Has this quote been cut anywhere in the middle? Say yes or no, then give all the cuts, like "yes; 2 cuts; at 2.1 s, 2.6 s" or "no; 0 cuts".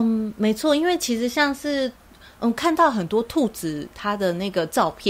no; 0 cuts